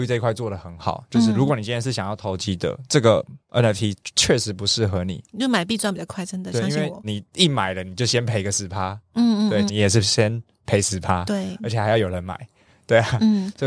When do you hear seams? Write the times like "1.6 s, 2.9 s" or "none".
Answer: 7.0 s, 9.7 s